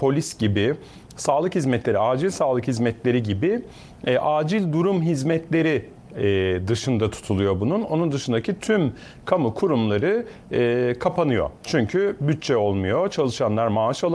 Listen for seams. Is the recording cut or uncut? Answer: uncut